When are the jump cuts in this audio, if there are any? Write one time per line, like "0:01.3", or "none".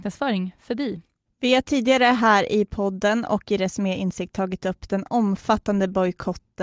0:01.3